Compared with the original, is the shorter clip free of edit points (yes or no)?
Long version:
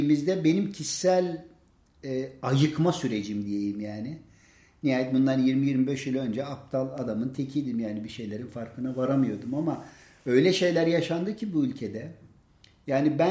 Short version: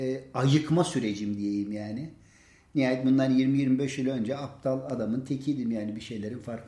yes